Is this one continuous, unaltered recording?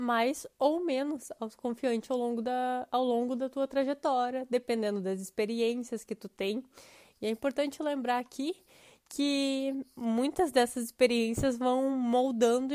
yes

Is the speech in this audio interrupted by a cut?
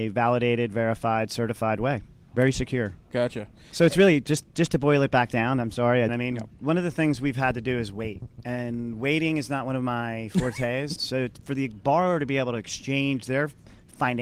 yes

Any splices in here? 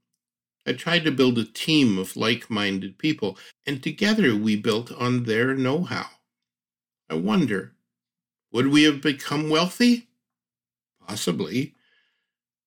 yes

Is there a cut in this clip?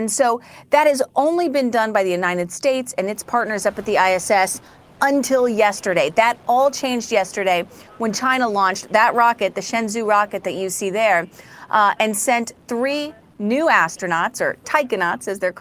no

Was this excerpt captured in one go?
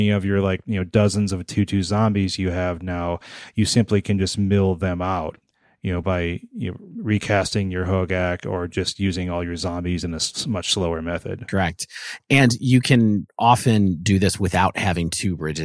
yes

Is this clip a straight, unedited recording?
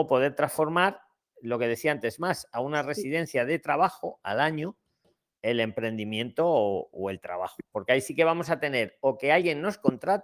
no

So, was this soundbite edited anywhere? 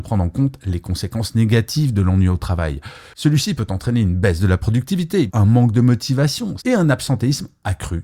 yes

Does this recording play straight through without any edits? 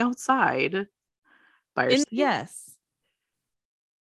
no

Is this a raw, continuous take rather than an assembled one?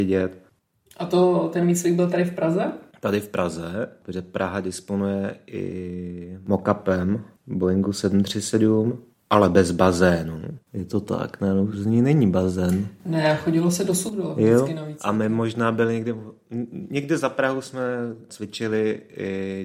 yes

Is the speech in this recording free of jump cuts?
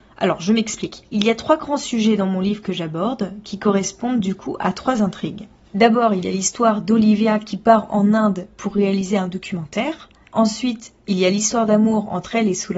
yes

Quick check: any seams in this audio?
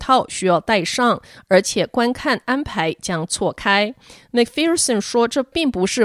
no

